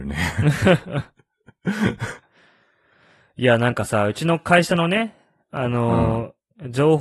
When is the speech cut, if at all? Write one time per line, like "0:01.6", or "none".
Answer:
none